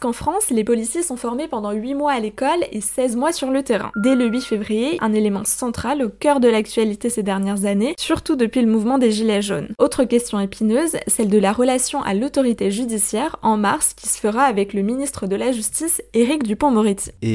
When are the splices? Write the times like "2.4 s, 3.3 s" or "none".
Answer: 3.9 s, 5.0 s